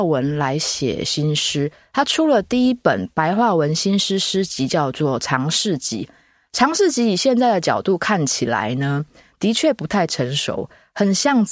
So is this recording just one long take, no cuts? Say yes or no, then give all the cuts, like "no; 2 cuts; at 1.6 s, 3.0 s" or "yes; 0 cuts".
yes; 0 cuts